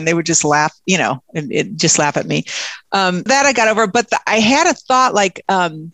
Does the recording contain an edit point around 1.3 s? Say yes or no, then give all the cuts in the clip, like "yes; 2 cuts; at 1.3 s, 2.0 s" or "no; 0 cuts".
no; 1 cut; at 3.3 s